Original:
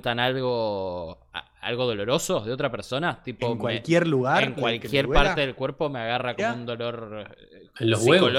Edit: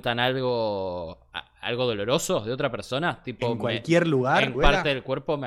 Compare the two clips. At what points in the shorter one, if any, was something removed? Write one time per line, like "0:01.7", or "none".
0:04.5